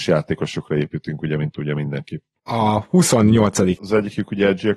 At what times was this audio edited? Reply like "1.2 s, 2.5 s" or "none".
2.4 s, 3.8 s